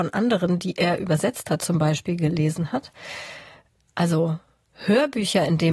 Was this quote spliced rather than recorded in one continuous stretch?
no; 0 cuts

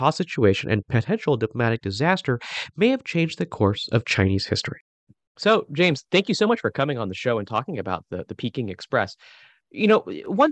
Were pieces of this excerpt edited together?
no; 0 cuts

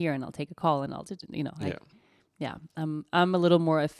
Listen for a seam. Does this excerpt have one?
no; 0 cuts

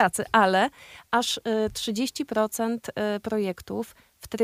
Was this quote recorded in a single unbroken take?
yes; 0 cuts

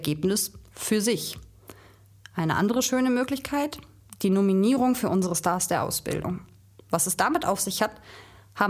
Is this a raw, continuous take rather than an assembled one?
yes; 0 cuts

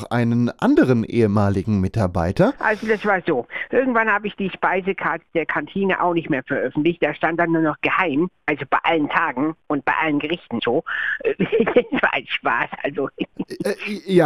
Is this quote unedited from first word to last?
no; 1 cut; at 10.6 s

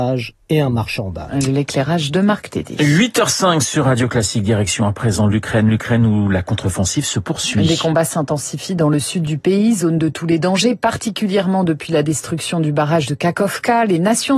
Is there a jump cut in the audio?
no; 0 cuts

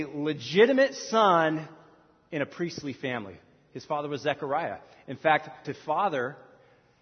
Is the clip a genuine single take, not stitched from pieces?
no; 1 cut; at 5.6 s

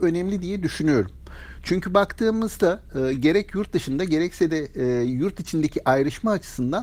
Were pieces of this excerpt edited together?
no; 0 cuts

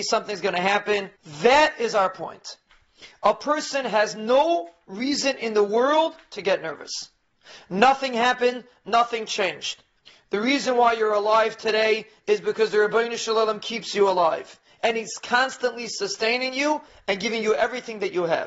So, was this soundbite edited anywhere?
yes; 1 cut; at 1.2 s

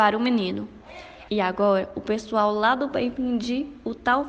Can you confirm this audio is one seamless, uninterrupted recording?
no; 1 cut; at 1.3 s

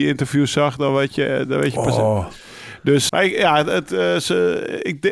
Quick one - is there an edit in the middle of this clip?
yes; 1 cut; at 3.1 s

